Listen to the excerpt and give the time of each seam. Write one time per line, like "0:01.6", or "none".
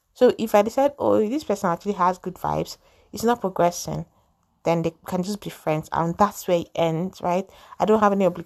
none